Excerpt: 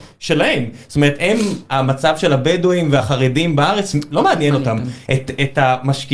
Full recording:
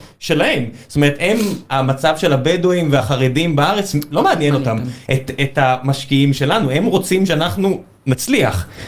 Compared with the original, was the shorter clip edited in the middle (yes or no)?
no